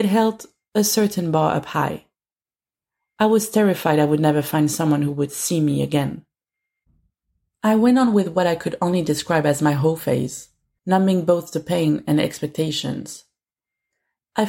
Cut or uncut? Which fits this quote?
cut